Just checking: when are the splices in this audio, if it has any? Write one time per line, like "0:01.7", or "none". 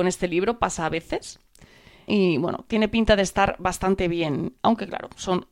0:02.1